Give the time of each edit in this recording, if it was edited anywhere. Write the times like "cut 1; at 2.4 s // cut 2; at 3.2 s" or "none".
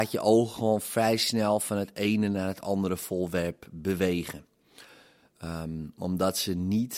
none